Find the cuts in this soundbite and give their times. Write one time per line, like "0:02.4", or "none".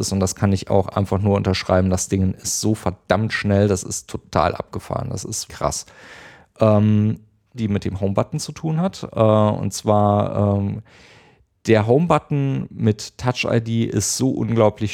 0:05.5
0:07.5